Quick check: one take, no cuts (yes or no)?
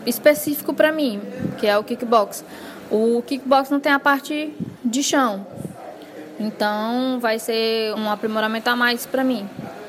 no